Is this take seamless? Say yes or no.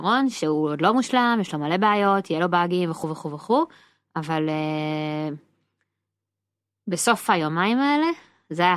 yes